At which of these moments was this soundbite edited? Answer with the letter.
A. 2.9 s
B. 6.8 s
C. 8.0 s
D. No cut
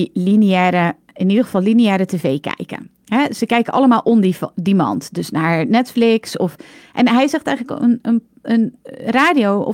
D